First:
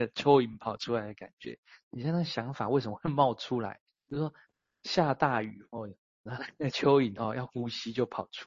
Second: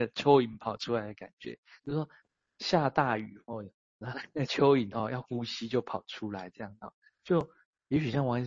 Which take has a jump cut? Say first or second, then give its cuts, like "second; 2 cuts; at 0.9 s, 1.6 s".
second; 1 cut; at 1.8 s